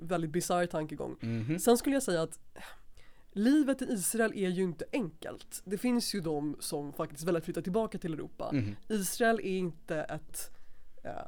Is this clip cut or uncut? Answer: uncut